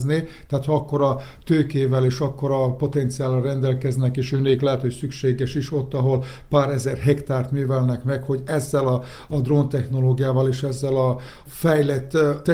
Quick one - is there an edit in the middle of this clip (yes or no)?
no